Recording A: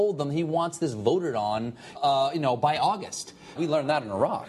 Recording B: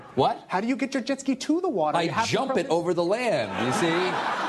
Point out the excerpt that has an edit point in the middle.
A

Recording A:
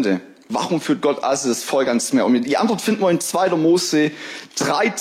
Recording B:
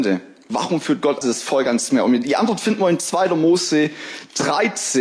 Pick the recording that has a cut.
B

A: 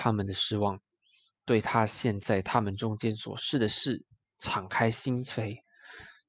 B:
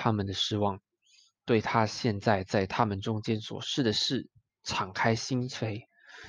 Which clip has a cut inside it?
A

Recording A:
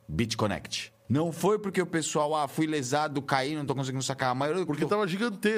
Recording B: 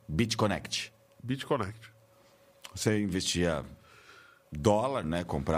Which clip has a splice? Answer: A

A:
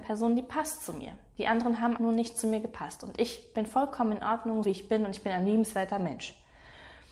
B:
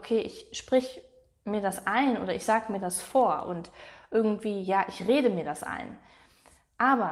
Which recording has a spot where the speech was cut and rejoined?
A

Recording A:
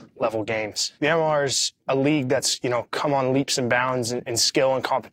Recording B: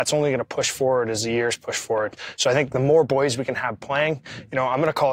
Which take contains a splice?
A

